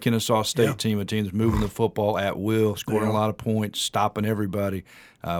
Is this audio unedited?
yes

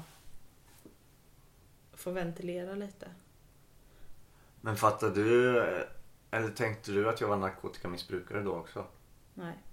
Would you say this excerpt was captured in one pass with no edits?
yes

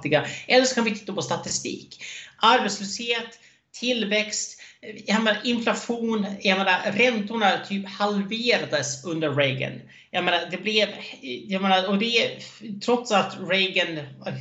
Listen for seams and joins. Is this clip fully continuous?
yes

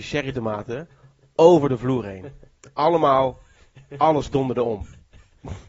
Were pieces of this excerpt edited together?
no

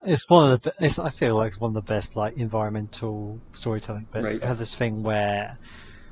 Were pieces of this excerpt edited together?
yes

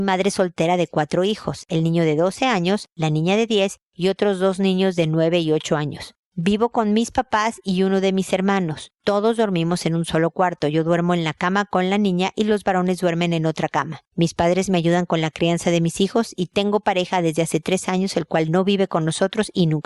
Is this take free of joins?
yes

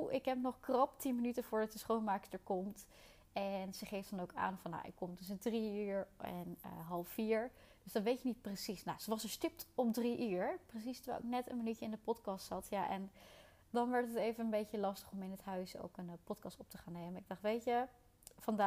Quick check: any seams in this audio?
no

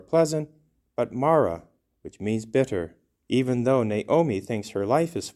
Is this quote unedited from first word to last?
no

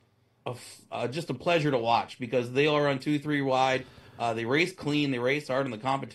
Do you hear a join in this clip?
no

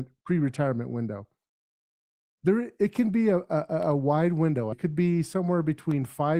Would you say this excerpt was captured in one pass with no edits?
no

